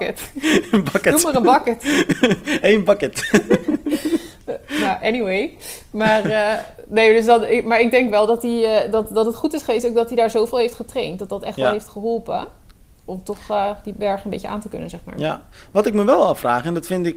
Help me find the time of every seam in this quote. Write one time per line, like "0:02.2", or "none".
none